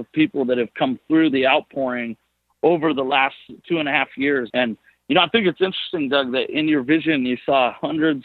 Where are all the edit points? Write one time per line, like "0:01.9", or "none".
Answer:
0:04.5